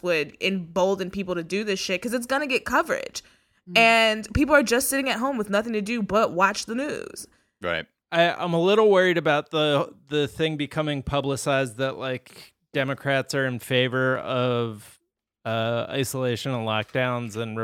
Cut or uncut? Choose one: cut